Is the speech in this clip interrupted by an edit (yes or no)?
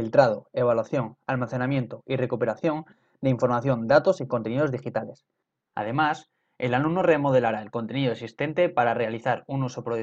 yes